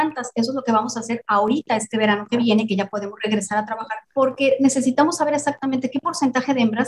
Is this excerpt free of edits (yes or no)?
yes